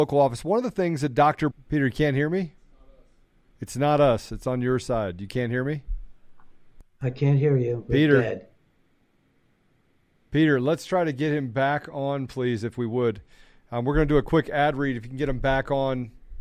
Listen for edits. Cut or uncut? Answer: cut